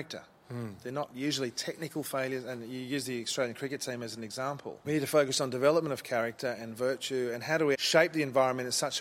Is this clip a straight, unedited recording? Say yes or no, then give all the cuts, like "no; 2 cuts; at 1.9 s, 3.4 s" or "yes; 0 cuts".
no; 2 cuts; at 4.8 s, 7.7 s